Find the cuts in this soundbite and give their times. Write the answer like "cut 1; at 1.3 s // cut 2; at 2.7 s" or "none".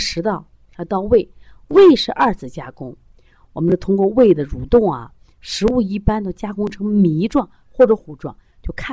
cut 1; at 8.0 s